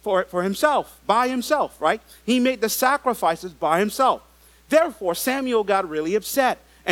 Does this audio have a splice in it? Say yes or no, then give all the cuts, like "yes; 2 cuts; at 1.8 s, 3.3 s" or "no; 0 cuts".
no; 0 cuts